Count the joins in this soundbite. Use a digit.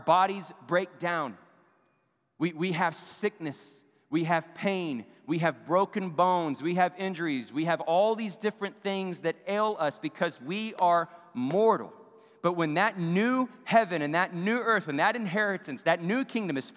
0